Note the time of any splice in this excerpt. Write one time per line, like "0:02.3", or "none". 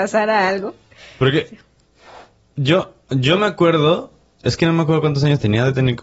none